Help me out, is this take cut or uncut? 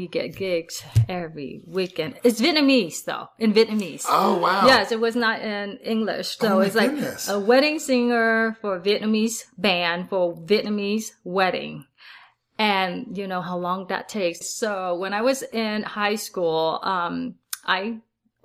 cut